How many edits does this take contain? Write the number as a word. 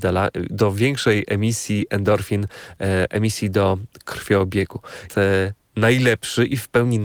one